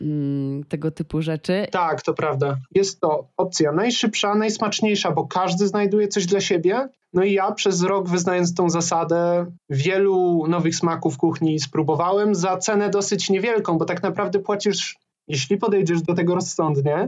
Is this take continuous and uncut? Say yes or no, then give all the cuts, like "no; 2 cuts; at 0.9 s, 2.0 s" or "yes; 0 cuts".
no; 1 cut; at 2.7 s